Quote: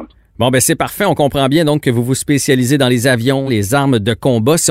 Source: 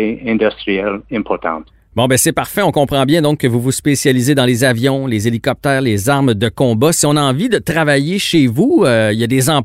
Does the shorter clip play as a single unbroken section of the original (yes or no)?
no